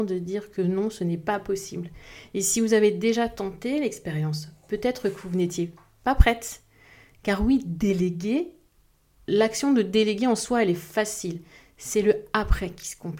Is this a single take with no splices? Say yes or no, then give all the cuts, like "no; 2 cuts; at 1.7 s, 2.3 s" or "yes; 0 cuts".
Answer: yes; 0 cuts